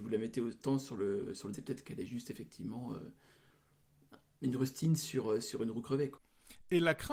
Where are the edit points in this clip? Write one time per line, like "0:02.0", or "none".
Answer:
0:01.5

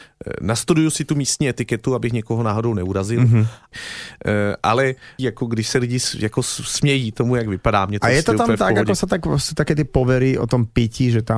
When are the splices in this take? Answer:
0:03.7
0:05.2

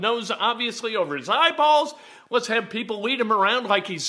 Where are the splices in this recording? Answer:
none

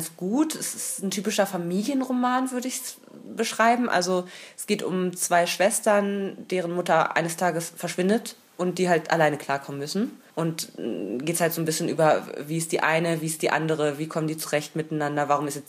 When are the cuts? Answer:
0:10.3

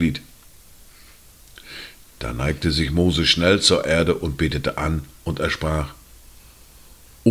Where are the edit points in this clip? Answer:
none

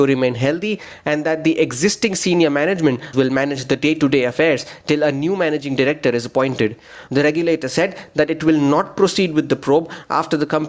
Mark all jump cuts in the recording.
0:03.1
0:07.1

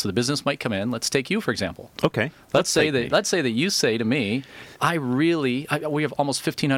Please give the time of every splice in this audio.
0:04.7

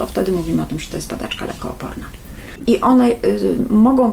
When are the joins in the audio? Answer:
0:02.6

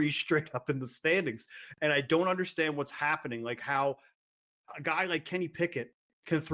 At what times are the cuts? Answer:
none

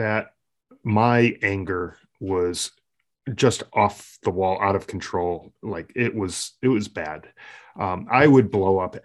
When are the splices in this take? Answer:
none

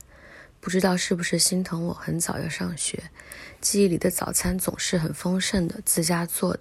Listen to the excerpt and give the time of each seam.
none

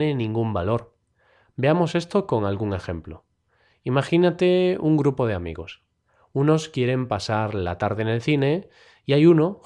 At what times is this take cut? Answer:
none

